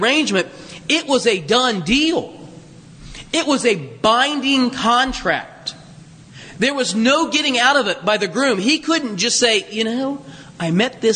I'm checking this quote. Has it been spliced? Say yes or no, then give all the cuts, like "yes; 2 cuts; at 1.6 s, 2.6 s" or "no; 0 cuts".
no; 0 cuts